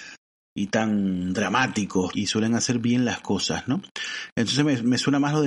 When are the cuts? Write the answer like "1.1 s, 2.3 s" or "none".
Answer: 2.1 s